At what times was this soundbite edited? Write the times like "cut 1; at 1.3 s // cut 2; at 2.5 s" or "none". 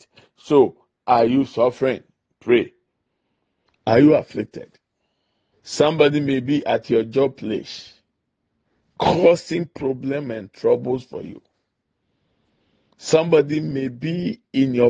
cut 1; at 3.7 s // cut 2; at 5.5 s